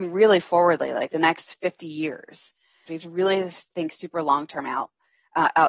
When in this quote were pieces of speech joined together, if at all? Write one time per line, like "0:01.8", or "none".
0:02.9